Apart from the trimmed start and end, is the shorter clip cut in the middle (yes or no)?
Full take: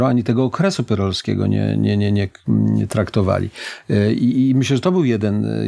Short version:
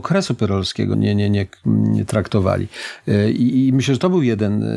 yes